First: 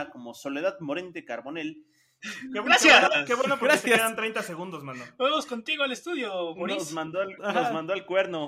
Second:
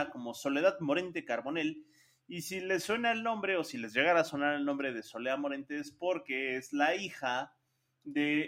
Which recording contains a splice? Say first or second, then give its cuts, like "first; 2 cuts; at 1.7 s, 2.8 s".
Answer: first; 2 cuts; at 2.2 s, 7.4 s